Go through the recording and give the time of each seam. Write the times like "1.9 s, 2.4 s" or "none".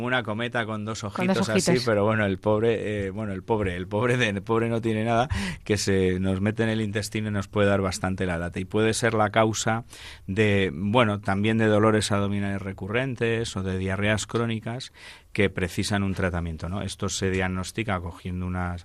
none